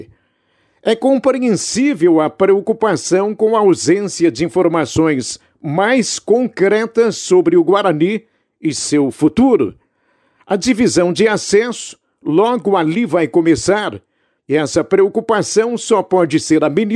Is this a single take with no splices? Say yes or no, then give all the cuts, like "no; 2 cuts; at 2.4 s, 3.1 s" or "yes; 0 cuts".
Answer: no; 1 cut; at 14.4 s